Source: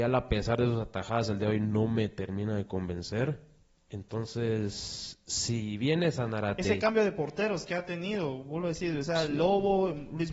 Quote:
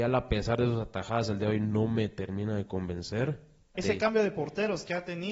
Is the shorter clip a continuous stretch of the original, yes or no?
no